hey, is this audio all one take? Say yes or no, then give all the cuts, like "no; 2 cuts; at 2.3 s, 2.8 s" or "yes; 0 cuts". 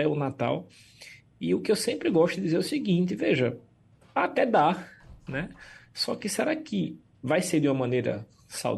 yes; 0 cuts